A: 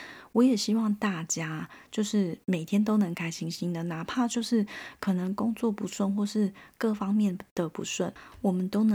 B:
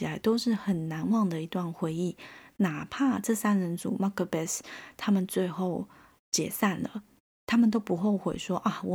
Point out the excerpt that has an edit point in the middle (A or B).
A